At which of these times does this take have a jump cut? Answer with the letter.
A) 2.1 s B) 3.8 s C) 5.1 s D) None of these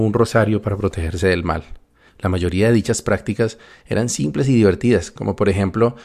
A